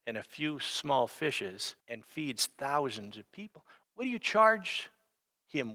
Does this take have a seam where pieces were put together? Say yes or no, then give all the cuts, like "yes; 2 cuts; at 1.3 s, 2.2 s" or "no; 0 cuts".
yes; 2 cuts; at 1.8 s, 3.8 s